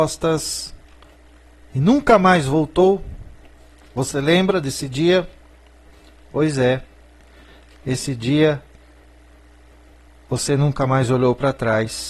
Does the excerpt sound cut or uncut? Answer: uncut